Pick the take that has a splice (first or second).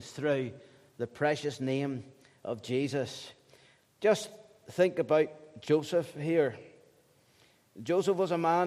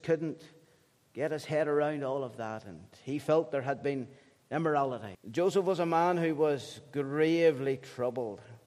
second